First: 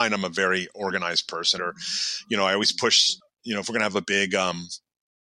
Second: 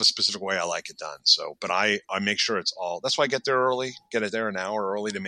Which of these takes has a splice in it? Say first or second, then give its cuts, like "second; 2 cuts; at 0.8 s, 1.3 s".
first; 1 cut; at 1.6 s